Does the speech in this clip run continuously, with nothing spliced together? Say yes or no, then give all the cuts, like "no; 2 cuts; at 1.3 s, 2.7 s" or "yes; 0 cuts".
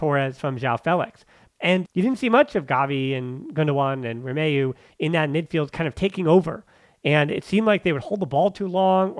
no; 1 cut; at 1.5 s